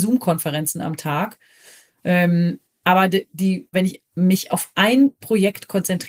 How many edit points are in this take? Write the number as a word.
one